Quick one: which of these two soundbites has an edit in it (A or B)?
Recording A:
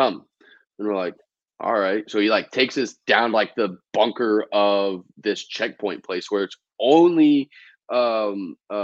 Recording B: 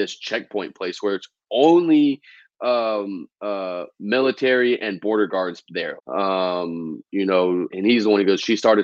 B